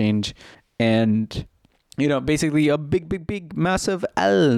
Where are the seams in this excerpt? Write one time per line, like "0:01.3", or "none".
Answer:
none